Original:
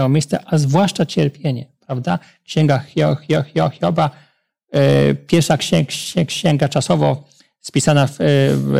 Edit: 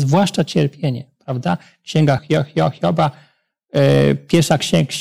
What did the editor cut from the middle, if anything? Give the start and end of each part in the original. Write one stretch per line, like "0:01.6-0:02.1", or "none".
0:02.8-0:03.2